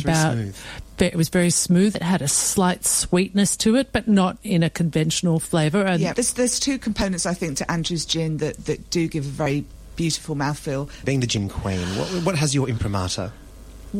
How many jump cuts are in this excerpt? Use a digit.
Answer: 2